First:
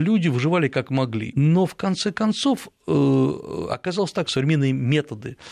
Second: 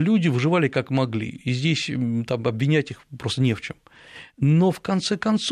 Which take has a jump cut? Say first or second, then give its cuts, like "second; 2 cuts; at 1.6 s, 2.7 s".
first; 2 cuts; at 1.3 s, 4.3 s